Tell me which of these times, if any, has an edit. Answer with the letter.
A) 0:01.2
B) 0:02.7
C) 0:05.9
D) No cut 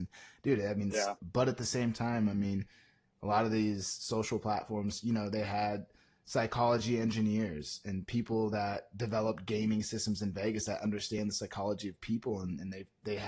A